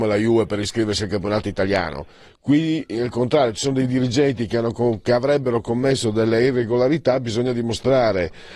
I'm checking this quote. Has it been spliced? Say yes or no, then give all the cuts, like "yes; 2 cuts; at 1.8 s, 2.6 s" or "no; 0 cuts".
yes; 1 cut; at 2.3 s